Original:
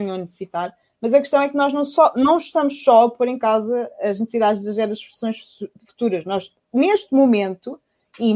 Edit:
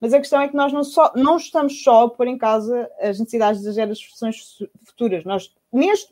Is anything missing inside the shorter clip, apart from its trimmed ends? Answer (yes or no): no